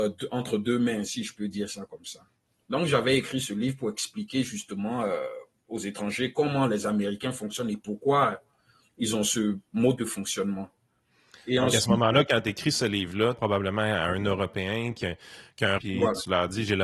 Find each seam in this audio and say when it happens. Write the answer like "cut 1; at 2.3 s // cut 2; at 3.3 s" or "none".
cut 1; at 13.4 s // cut 2; at 15.8 s